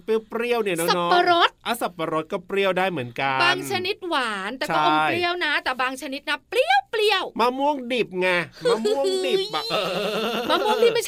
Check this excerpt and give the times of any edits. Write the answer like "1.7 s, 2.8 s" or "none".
9.7 s